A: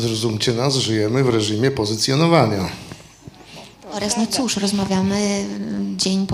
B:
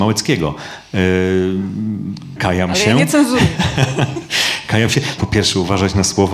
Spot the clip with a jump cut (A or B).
B